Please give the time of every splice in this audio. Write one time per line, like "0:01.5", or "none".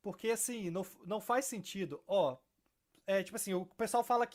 none